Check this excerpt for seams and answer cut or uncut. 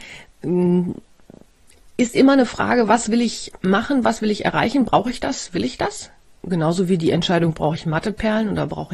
uncut